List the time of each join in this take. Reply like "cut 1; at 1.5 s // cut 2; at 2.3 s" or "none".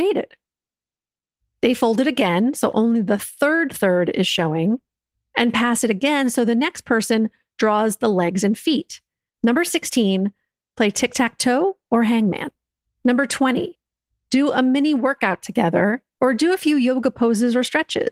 cut 1; at 1.4 s // cut 2; at 9.3 s // cut 3; at 12.8 s